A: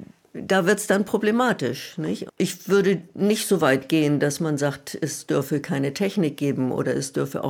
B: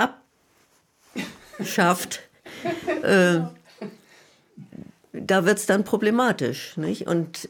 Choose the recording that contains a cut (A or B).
A